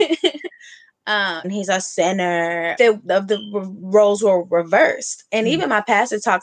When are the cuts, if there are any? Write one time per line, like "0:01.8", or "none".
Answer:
0:01.4
0:02.8